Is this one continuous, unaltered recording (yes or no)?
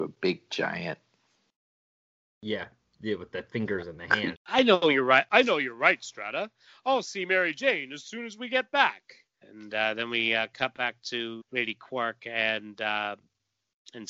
no